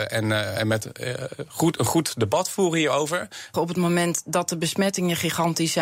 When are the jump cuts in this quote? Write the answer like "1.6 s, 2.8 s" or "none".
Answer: 3.5 s